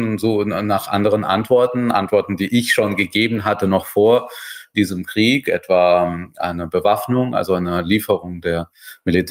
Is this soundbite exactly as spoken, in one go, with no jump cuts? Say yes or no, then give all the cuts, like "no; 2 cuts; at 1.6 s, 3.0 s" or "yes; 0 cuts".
yes; 0 cuts